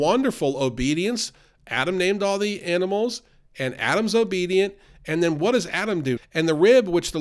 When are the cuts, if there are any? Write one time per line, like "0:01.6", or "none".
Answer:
0:06.2